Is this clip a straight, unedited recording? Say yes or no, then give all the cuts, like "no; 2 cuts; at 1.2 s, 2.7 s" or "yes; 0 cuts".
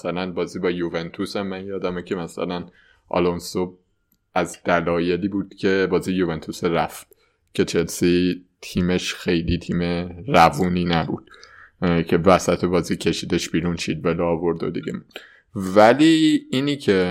yes; 0 cuts